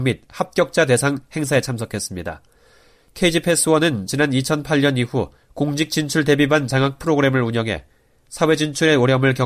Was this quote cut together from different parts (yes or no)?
no